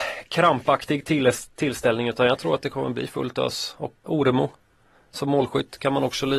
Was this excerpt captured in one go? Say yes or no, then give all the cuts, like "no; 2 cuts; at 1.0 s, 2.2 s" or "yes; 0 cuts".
no; 1 cut; at 4.1 s